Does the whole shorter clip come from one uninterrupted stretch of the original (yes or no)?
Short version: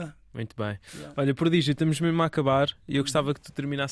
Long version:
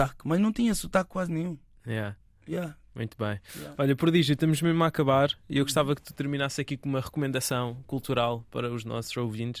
yes